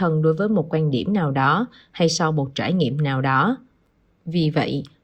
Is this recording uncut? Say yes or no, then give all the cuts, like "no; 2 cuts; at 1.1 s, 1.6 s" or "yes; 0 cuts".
yes; 0 cuts